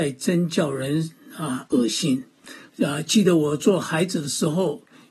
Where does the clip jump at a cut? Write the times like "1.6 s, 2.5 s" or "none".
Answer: 2.7 s